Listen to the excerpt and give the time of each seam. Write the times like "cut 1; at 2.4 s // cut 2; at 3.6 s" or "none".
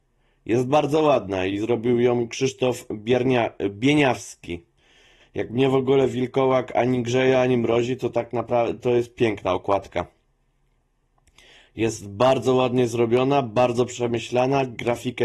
cut 1; at 5.2 s